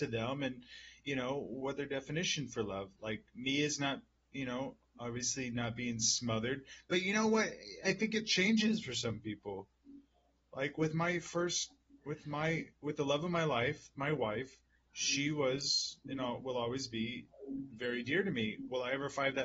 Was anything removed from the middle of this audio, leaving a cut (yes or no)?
no